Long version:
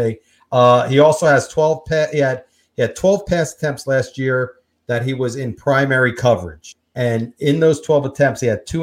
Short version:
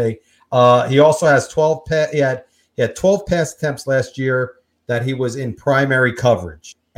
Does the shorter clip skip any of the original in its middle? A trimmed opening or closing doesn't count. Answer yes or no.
no